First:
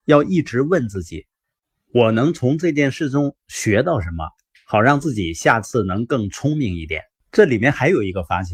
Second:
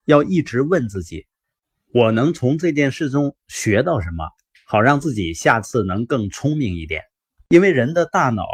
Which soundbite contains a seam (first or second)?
first